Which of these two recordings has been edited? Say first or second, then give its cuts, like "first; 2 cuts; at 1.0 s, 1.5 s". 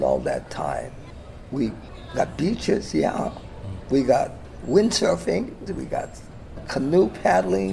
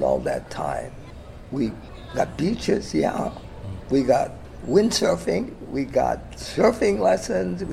first; 1 cut; at 5.7 s